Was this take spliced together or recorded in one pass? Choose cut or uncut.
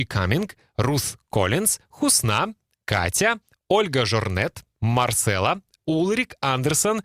cut